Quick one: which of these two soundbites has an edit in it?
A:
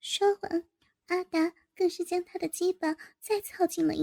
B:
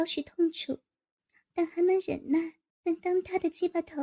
B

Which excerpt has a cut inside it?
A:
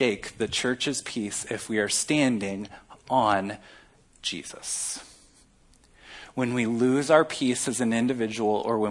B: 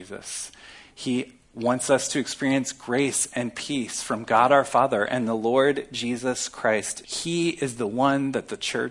B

